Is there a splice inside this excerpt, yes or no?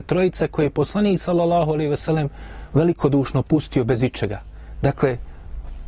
no